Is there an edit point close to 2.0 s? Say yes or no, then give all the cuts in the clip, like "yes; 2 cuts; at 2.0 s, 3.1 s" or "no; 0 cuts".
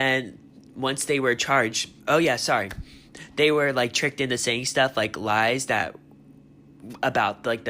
yes; 1 cut; at 2.0 s